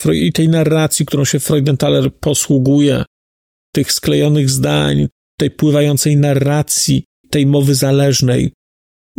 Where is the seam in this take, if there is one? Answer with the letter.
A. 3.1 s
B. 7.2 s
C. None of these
B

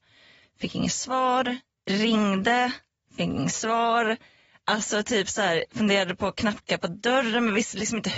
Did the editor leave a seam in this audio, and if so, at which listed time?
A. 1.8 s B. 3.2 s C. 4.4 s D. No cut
D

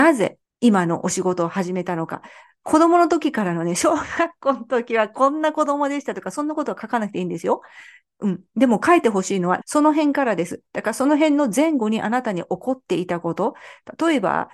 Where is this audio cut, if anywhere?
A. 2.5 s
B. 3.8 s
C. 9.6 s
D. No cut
C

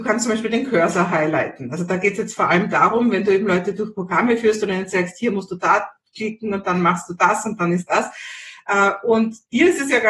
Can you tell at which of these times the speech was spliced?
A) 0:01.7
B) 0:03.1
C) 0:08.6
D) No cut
D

